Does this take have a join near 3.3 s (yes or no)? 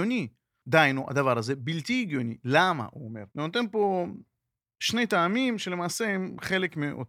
yes